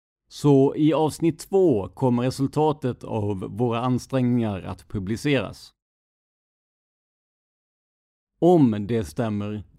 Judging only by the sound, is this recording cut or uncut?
cut